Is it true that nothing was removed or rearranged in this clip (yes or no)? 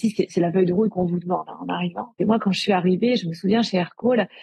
yes